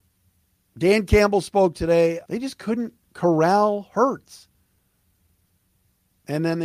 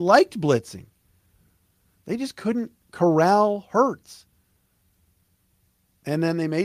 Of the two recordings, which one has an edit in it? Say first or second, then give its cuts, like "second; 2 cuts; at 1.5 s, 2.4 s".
first; 1 cut; at 2.2 s